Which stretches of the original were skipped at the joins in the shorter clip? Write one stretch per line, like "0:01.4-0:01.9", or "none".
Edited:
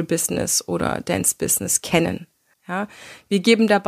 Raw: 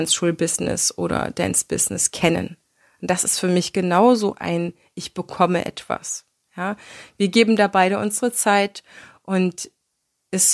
0:02.8-0:06.4

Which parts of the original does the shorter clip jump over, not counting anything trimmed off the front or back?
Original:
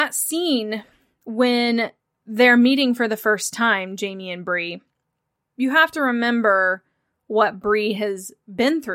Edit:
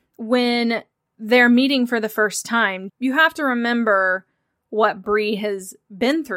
0:04.0-0:05.5

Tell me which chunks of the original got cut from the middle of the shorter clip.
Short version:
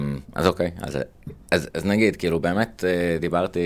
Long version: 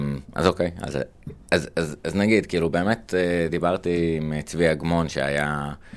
0:01.7-0:02.0

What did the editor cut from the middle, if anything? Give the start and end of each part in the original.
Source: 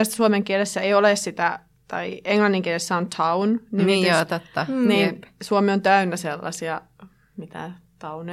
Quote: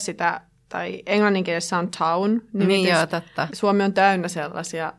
0:04.7-0:05.4

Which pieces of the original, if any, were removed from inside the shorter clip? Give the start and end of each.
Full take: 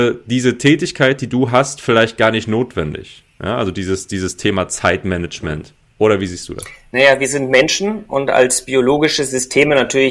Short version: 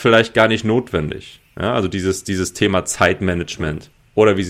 none

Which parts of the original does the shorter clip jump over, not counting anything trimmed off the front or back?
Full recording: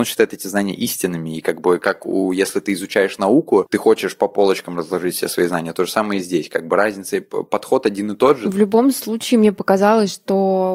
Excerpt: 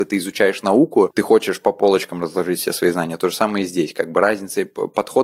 none

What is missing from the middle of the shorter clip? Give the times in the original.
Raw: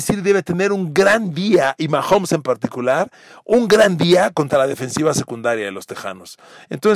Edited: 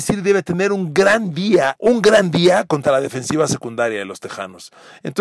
0:01.8-0:03.4

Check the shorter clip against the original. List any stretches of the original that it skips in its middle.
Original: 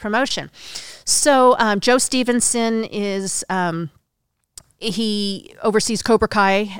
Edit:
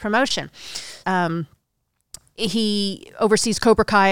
0:01.0-0:03.5

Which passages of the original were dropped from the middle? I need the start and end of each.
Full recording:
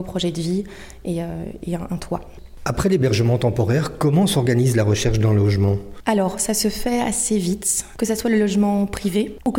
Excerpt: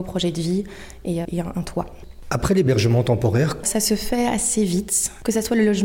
0:01.2-0:01.6
0:04.0-0:06.4

